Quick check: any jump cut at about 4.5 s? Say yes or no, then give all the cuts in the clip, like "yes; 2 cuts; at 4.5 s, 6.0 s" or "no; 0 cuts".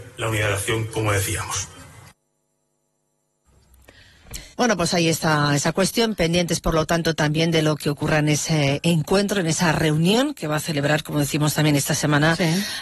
yes; 1 cut; at 4.5 s